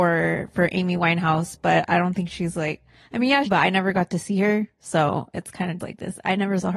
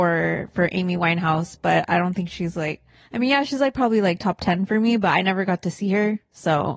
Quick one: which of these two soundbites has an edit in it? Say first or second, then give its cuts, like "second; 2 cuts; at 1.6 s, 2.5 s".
first; 2 cuts; at 3.5 s, 5.8 s